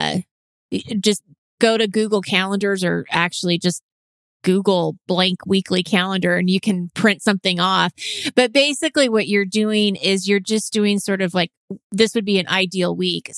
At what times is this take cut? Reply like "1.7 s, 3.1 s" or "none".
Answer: none